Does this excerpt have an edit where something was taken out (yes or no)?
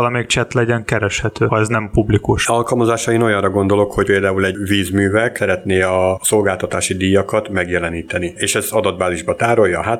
yes